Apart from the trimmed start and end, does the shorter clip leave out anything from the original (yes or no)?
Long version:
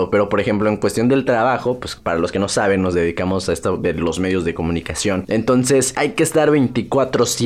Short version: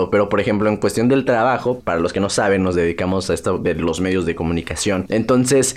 yes